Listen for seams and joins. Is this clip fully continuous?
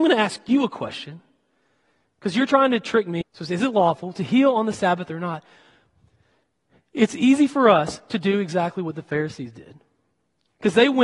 no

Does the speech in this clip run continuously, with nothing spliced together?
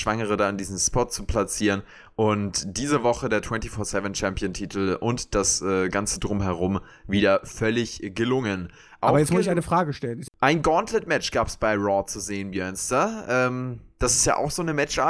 no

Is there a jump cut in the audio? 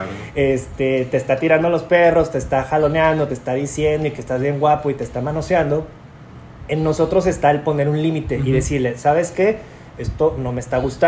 no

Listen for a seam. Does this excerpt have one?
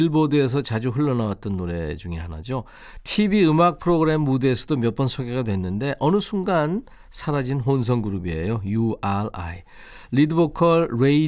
no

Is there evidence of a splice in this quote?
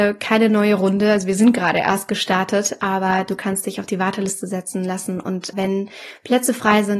yes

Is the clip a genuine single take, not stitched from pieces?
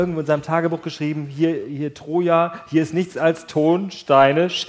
yes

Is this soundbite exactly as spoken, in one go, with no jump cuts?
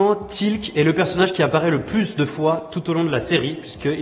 yes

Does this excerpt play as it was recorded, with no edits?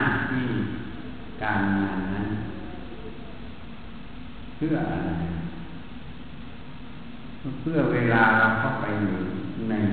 yes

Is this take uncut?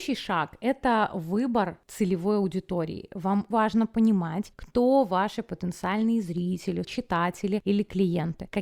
no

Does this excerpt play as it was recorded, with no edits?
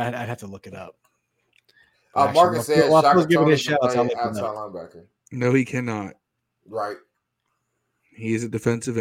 yes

